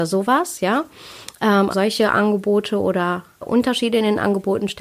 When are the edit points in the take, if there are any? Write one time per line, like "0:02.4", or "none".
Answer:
0:01.7
0:03.4